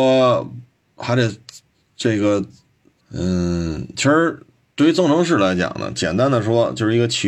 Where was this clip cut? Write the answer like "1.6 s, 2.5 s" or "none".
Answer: 3.0 s